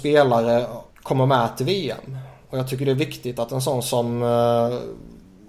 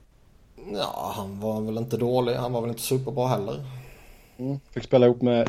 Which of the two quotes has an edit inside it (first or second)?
first